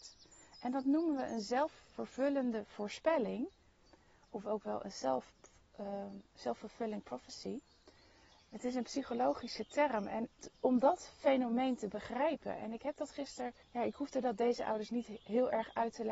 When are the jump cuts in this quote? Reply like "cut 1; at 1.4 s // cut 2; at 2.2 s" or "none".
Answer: cut 1; at 10.4 s // cut 2; at 13.6 s